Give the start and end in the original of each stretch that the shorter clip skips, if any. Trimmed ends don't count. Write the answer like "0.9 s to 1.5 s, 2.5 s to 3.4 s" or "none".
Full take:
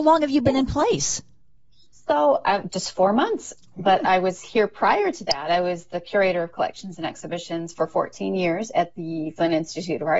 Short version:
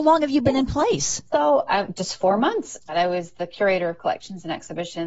1.3 s to 2.0 s, 3.6 s to 5.4 s